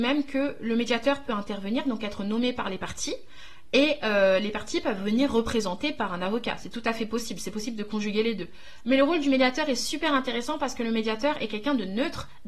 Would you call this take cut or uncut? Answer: uncut